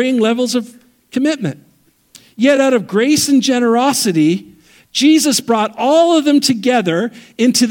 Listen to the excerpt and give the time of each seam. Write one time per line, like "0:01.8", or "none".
none